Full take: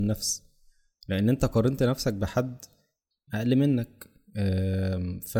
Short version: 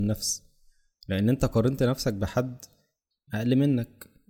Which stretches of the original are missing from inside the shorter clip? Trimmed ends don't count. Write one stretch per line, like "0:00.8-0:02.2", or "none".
none